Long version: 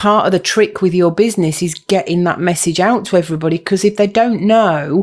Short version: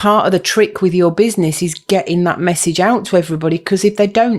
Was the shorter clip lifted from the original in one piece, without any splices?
yes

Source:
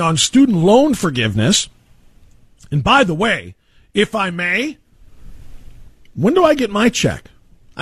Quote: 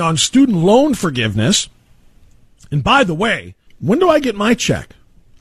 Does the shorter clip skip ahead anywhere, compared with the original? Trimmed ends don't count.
yes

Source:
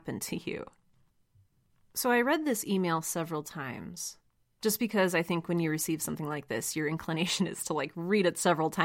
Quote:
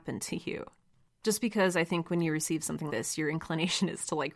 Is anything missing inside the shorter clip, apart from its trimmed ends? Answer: yes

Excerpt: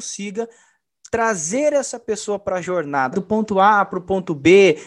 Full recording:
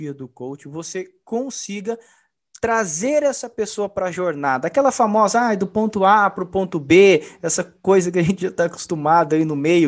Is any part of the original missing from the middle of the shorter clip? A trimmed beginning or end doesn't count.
yes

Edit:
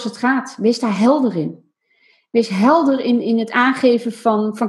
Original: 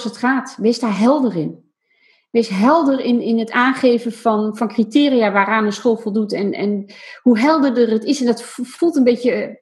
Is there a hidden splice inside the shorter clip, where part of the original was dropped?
no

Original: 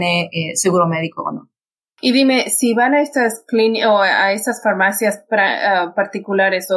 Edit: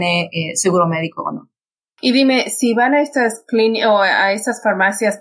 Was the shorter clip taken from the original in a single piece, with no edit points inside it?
yes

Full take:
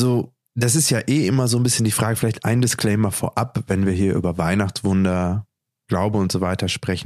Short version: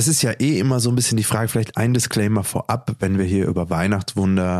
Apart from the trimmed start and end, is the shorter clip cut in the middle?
no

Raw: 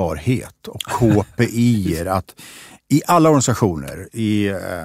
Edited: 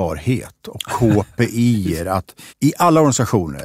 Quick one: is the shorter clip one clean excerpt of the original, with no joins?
no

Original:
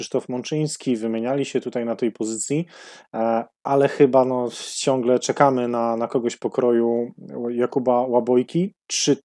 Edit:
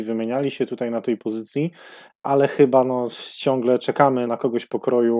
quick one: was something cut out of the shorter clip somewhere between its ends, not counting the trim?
yes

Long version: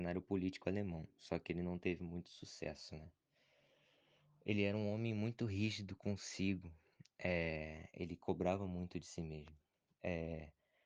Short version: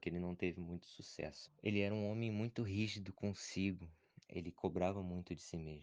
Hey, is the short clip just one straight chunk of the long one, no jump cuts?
no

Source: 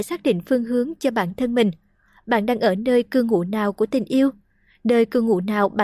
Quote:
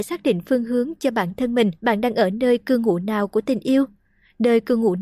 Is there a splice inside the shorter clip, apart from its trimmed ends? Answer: yes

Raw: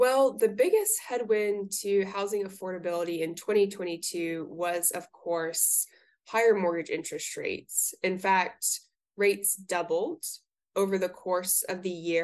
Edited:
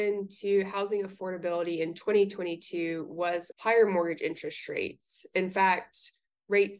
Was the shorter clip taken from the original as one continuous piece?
no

